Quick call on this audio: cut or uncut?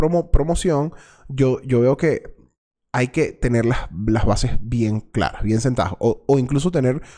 uncut